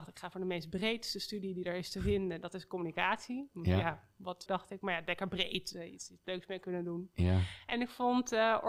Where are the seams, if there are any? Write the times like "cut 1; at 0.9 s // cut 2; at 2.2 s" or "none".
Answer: cut 1; at 4.5 s // cut 2; at 5.7 s